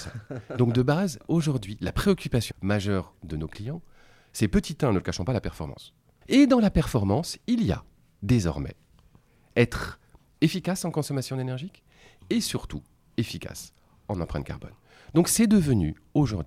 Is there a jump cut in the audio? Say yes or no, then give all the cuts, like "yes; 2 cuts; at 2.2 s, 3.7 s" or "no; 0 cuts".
yes; 2 cuts; at 2.5 s, 6.2 s